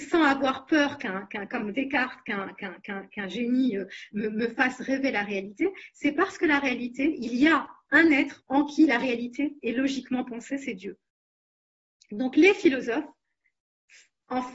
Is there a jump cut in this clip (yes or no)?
no